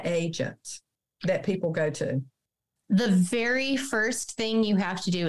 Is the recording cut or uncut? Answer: uncut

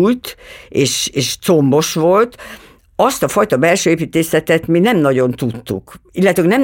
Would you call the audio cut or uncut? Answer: uncut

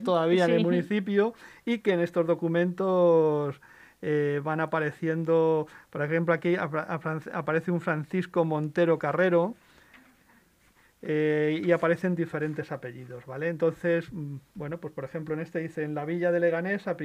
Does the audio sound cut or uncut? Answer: uncut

